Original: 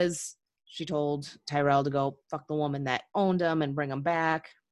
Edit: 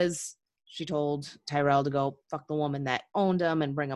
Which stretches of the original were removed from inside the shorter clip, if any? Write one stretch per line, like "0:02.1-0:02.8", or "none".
none